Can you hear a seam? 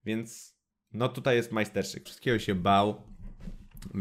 yes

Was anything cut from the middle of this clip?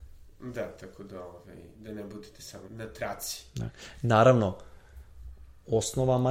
yes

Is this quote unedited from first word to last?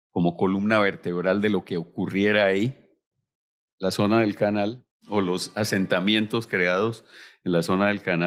no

